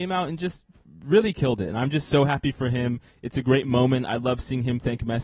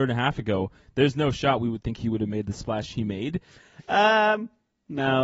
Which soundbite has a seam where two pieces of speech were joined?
second; 1 cut; at 3.5 s

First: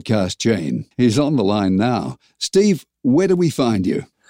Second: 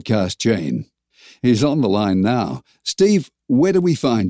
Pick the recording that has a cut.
first; 1 cut; at 0.9 s

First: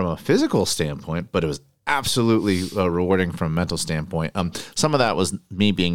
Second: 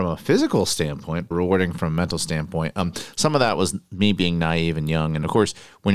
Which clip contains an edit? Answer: second; 1 cut; at 1.3 s

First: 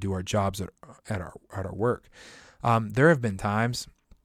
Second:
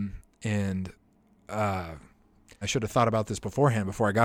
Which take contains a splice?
second; 1 cut; at 2.6 s

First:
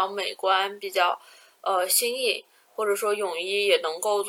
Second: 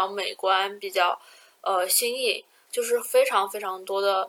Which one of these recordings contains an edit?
second; 1 cut; at 2.7 s

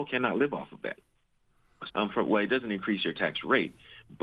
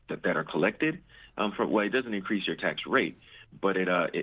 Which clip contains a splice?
first; 1 cut; at 1.9 s

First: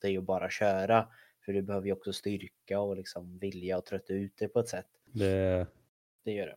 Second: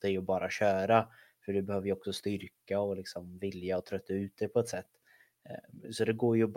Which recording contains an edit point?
first; 1 cut; at 5.1 s

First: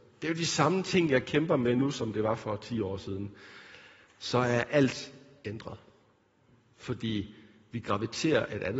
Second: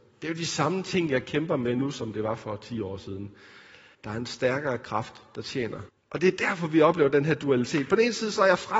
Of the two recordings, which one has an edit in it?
second; 2 cuts; at 3.9 s, 5.9 s

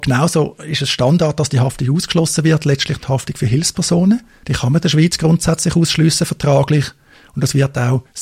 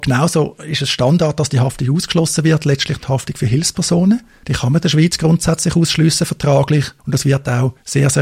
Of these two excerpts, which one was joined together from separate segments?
second; 1 cut; at 7.0 s

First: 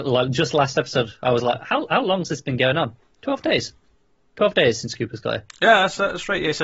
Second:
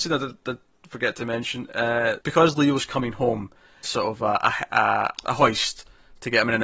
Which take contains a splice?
second; 3 cuts; at 2.2 s, 3.8 s, 5.1 s

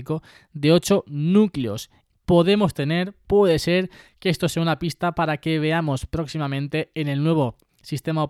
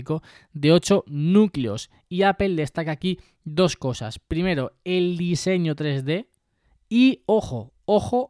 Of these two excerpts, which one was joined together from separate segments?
first; 1 cut; at 2.1 s

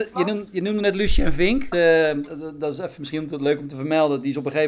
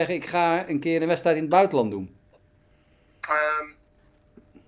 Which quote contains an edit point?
first; 1 cut; at 1.7 s

